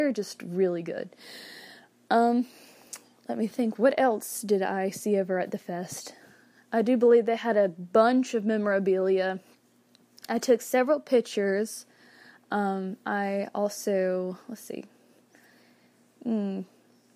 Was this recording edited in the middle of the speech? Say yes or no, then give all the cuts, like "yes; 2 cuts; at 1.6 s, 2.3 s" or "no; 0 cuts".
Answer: no; 0 cuts